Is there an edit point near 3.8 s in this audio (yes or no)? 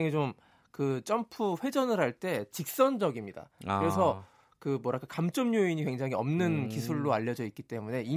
no